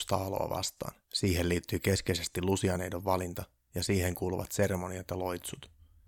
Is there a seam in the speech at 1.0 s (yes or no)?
yes